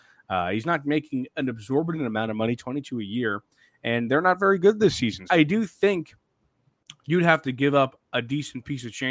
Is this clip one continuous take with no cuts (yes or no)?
no